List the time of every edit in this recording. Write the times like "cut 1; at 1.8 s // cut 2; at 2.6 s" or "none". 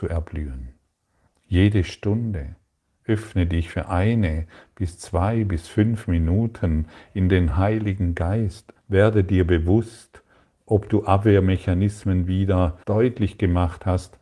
cut 1; at 1.3 s // cut 2; at 8.8 s // cut 3; at 12.8 s